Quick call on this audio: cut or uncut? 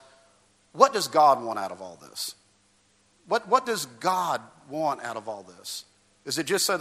uncut